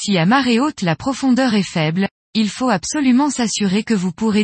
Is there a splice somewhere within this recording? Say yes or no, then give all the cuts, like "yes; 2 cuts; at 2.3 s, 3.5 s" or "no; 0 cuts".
no; 0 cuts